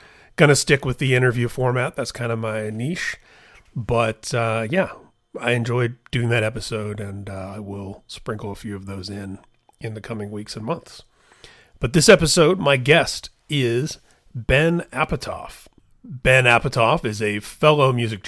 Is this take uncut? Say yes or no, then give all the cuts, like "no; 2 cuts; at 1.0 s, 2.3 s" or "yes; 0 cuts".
yes; 0 cuts